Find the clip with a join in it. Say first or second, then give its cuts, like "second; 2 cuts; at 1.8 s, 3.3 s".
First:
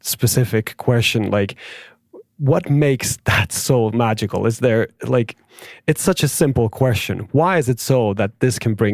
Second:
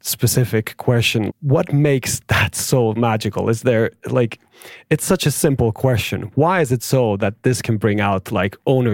second; 1 cut; at 1.3 s